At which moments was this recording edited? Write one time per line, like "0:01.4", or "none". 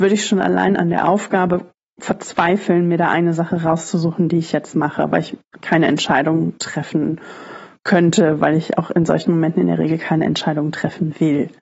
0:05.1